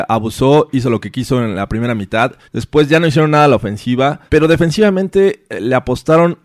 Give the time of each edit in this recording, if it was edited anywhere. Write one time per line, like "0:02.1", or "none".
0:02.4
0:04.3